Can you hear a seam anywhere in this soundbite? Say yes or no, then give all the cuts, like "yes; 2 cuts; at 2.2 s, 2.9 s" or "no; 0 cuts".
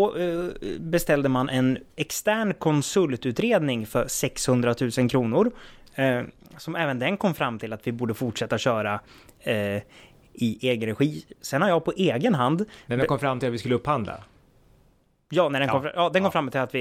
no; 0 cuts